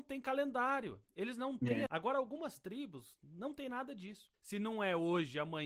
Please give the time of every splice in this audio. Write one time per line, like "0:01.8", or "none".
0:01.9
0:04.3